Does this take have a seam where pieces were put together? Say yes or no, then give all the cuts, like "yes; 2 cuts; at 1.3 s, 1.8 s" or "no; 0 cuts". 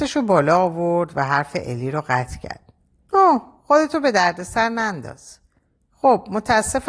yes; 1 cut; at 3.1 s